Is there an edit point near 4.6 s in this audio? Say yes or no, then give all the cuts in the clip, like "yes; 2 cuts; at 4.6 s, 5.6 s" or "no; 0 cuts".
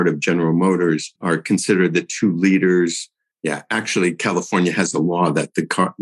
no; 2 cuts; at 1.2 s, 3.3 s